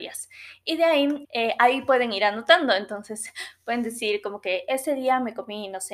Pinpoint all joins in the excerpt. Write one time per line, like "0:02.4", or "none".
0:01.2